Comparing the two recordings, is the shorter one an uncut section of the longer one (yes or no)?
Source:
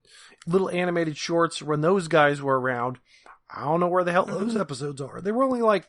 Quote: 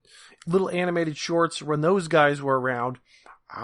yes